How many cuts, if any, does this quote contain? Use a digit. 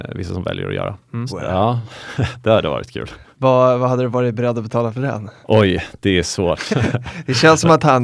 3